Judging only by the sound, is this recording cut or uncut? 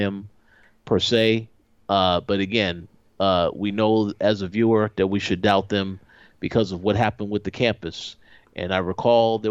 uncut